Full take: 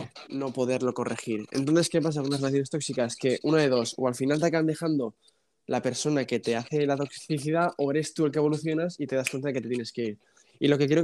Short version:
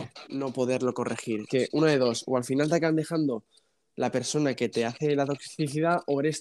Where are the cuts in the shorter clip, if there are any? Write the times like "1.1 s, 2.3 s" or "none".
1.5 s